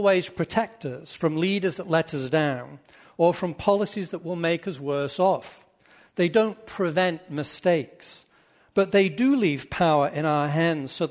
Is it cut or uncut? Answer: uncut